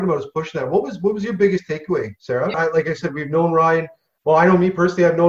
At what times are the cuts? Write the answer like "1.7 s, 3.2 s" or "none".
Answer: 2.5 s